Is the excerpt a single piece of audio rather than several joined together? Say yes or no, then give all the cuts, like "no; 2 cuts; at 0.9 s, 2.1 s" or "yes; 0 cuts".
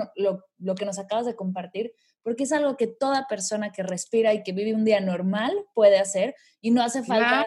yes; 0 cuts